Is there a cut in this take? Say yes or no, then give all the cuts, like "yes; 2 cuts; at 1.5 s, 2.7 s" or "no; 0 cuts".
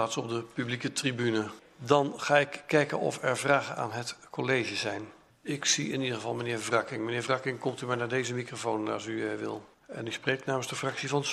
no; 0 cuts